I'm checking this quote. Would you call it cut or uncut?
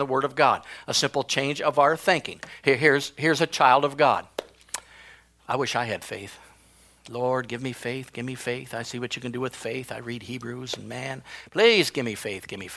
uncut